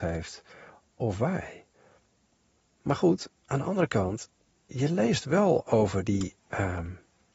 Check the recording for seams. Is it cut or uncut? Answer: uncut